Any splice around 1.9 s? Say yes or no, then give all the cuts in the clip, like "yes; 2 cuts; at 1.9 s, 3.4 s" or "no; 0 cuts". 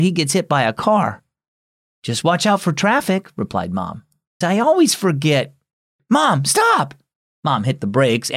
no; 1 cut; at 4.4 s